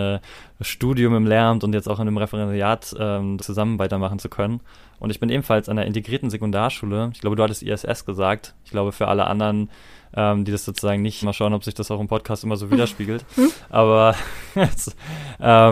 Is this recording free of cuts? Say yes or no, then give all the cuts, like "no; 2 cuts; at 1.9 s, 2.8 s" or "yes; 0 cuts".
no; 2 cuts; at 3.4 s, 11.2 s